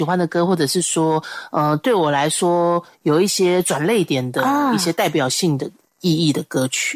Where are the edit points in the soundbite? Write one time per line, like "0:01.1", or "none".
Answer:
none